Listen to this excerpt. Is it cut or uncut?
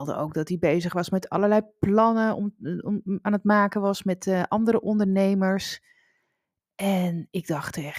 uncut